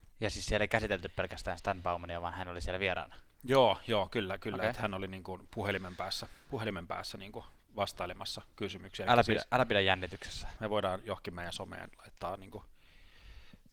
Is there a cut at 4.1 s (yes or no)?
no